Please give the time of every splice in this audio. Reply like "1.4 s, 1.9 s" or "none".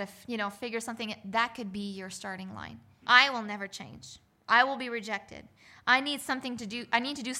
3.0 s